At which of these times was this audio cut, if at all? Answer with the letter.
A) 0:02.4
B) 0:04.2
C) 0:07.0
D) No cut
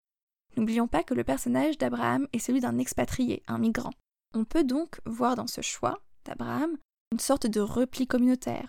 B